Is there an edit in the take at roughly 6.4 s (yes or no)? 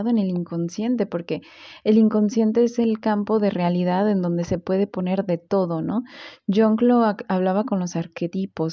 no